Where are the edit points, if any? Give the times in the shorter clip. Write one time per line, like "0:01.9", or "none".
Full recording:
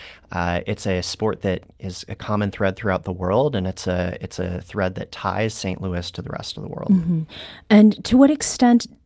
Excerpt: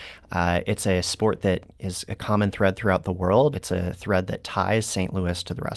0:03.5

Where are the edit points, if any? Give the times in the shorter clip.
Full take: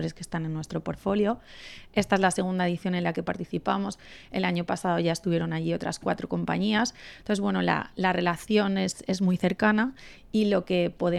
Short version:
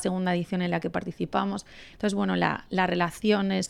0:01.9

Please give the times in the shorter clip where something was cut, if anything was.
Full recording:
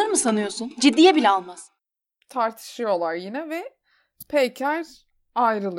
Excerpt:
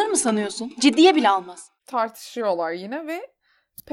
0:01.8

